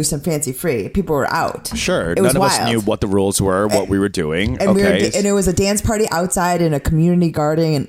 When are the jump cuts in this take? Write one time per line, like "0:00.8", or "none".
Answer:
none